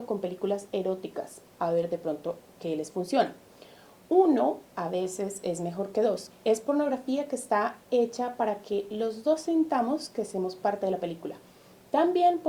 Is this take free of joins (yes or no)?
no